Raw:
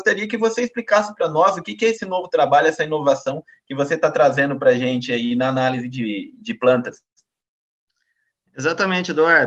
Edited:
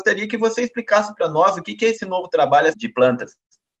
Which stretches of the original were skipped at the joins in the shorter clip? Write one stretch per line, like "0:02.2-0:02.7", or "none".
0:02.7-0:06.4